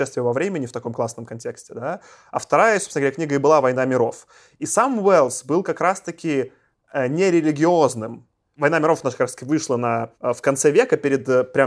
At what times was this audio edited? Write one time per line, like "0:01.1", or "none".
0:08.6
0:10.1